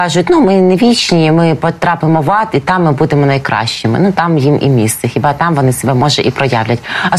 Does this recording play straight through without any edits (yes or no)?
yes